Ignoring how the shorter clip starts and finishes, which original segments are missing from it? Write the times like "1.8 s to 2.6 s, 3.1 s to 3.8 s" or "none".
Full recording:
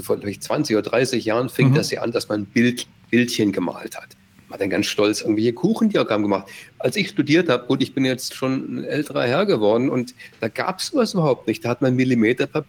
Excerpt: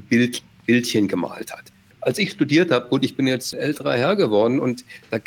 4.3 s to 6.7 s, 8.3 s to 8.8 s